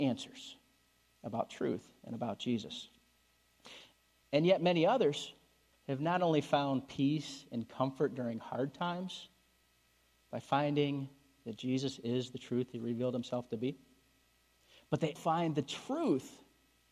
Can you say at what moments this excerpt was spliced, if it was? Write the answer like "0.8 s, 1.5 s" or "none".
4.2 s, 5.7 s, 15.2 s

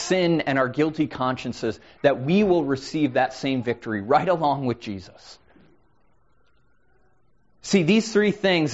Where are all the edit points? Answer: none

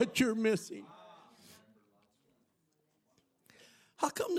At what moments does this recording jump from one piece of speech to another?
none

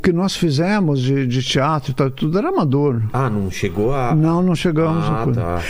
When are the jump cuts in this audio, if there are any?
none

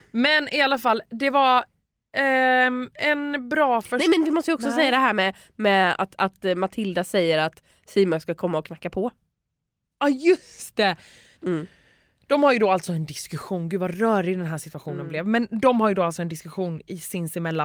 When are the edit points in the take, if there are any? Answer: 11.4 s

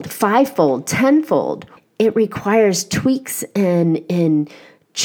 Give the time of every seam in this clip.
1.8 s

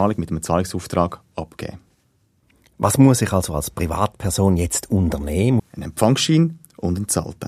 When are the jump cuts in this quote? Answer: 5.6 s

